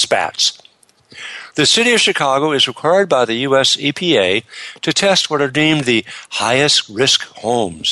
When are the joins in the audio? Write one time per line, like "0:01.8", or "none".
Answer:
0:01.5